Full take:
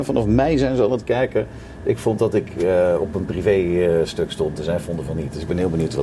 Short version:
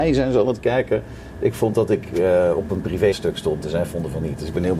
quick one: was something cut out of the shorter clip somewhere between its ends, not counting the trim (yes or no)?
yes